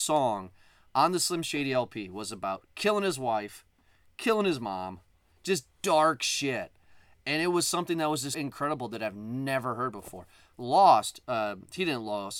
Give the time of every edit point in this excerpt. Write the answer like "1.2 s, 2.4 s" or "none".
8.3 s, 10.5 s